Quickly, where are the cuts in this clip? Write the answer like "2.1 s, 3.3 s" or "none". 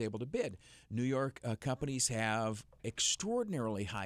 none